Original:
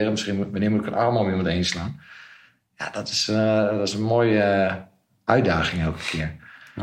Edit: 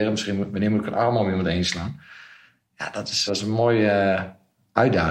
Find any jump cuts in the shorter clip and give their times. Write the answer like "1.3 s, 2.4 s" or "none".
3.3 s